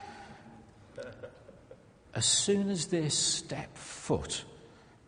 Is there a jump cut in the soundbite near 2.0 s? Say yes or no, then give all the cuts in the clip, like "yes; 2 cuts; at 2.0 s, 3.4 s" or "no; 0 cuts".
yes; 1 cut; at 2.0 s